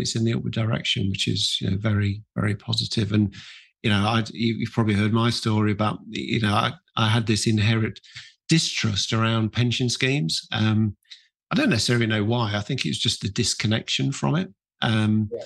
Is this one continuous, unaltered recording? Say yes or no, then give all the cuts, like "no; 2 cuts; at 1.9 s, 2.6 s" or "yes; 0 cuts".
yes; 0 cuts